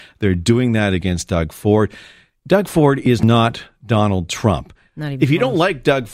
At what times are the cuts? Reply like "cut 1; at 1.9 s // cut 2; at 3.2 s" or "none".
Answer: none